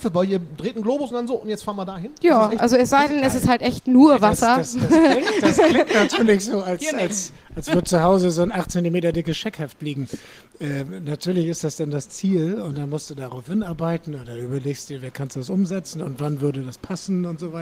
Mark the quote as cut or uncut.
uncut